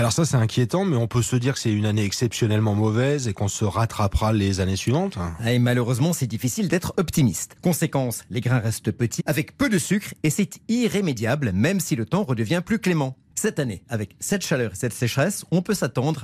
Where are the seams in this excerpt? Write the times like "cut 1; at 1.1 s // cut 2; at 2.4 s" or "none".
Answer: cut 1; at 7.6 s // cut 2; at 9.2 s